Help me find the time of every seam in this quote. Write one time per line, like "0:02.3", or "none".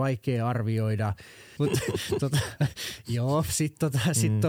0:01.6
0:03.5

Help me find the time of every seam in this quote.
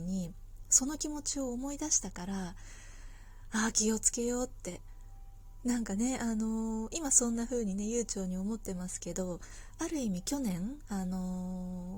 none

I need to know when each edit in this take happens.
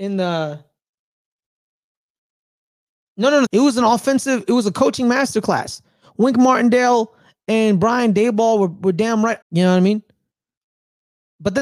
0:03.5
0:09.4

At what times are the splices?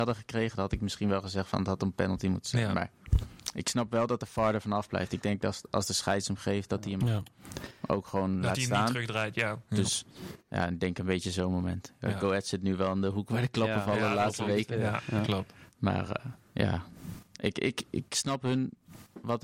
none

